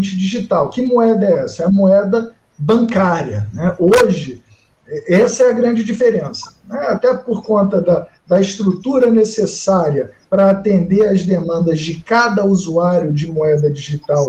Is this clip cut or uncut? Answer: uncut